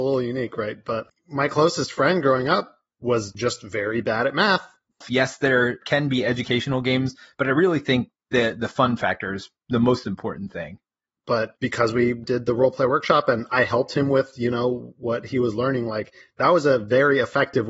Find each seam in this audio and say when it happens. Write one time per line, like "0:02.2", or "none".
0:04.9
0:11.2